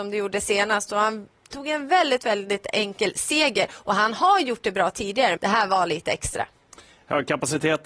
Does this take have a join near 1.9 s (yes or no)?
no